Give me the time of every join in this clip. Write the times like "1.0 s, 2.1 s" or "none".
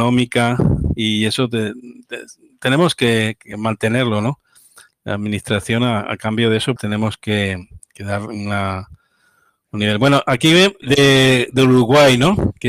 6.8 s, 10.8 s